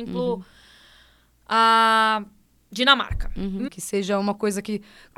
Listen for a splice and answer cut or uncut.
cut